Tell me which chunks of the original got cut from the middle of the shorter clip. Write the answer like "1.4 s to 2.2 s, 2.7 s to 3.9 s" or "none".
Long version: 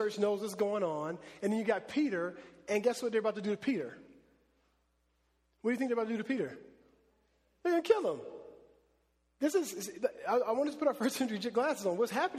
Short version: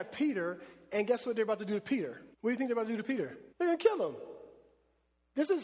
4.1 s to 5.5 s, 6.7 s to 7.6 s